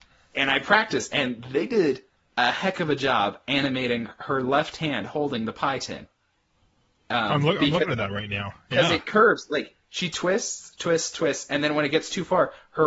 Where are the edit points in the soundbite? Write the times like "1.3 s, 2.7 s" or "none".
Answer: none